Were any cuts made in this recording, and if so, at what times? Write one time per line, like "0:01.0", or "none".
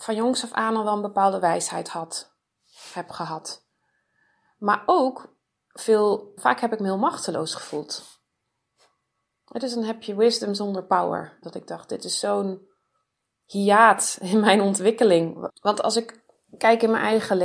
0:06.4
0:11.4
0:15.5